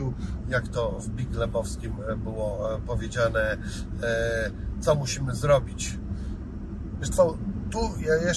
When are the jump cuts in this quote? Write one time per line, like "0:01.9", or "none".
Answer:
0:07.0

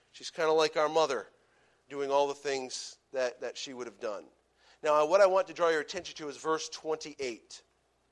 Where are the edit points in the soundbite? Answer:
0:01.9

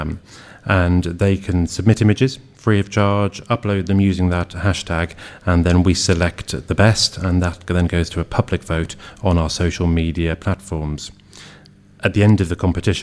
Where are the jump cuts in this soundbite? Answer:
none

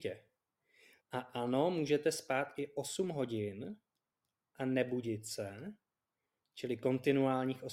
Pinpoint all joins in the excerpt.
0:01.0

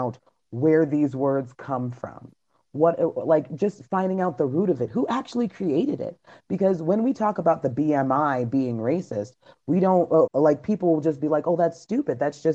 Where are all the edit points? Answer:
0:10.3

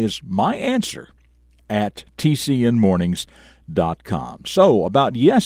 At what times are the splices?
none

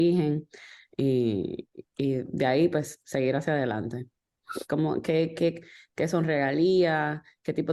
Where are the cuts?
0:04.6

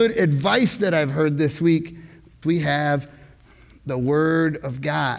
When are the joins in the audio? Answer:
0:02.4

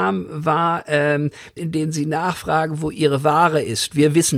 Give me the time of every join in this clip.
0:01.6

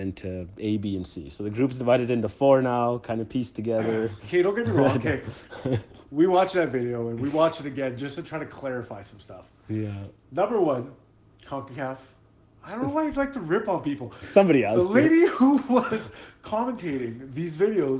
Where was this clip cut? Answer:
0:14.2

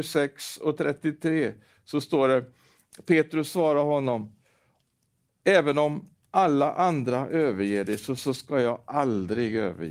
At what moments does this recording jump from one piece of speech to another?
none

